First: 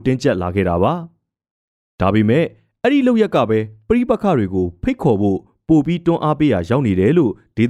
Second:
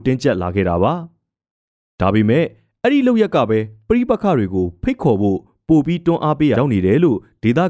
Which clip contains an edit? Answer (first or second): second